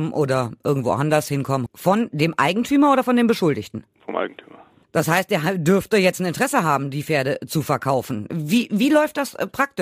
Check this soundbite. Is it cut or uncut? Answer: cut